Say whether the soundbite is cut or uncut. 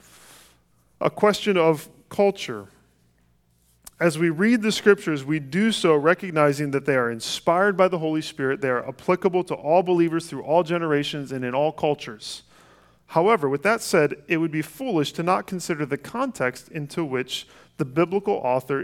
uncut